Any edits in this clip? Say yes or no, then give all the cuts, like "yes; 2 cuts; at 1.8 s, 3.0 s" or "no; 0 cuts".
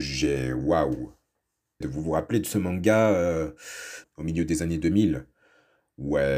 yes; 2 cuts; at 1.8 s, 4.0 s